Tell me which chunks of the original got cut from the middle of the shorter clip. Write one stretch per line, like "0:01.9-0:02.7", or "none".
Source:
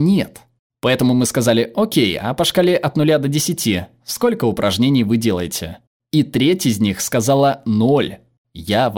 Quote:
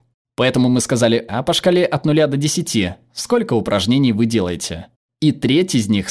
0:01.7-0:02.2